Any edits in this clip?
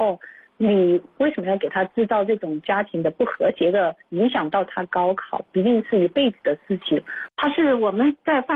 yes; 1 cut; at 7.3 s

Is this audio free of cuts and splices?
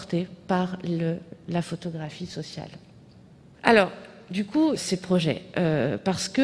no; 2 cuts; at 3.5 s, 4.8 s

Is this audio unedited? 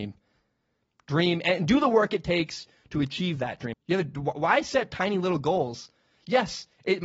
no; 1 cut; at 3.7 s

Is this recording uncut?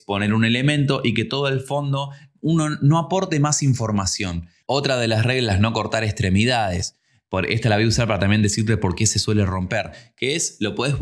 no; 1 cut; at 4.6 s

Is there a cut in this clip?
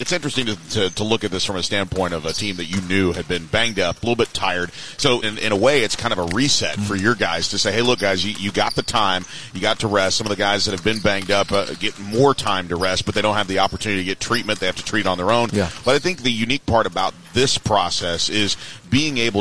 yes; 1 cut; at 5.2 s

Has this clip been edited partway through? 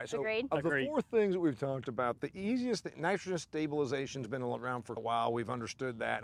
yes; 1 cut; at 5.0 s

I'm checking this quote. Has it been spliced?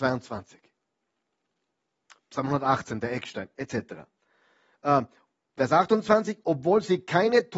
no; 0 cuts

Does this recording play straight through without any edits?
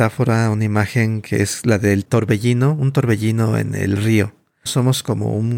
no; 1 cut; at 4.7 s

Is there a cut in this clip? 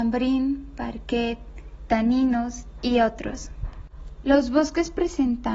yes; 2 cuts; at 1.9 s, 4.2 s

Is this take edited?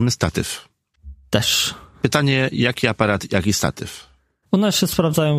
no; 0 cuts

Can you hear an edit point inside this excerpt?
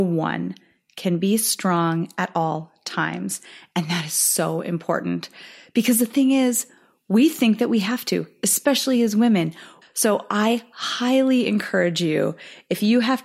yes; 1 cut; at 9.8 s

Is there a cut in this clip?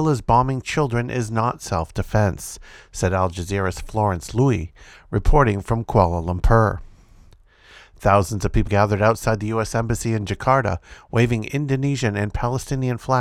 yes; 1 cut; at 8.7 s

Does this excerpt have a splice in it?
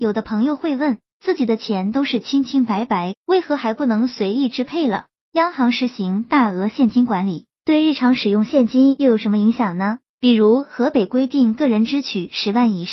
yes; 2 cuts; at 3.1 s, 10.1 s

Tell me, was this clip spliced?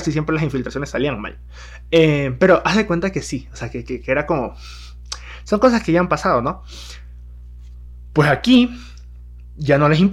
no; 0 cuts

